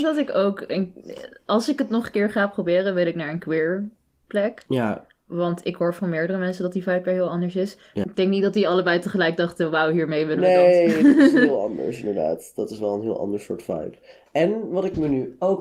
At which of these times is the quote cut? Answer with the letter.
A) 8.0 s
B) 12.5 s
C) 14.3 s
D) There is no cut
A